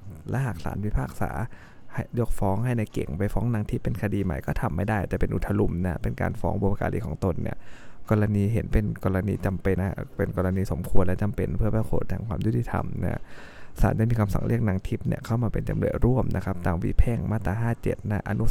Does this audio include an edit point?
yes; 1 cut; at 9.8 s

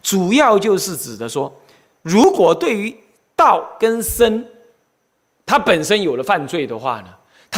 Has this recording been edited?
no; 0 cuts

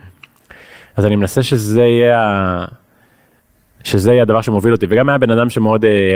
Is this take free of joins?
yes; 0 cuts

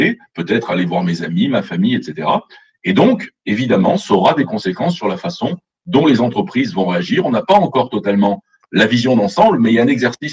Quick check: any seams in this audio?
no; 0 cuts

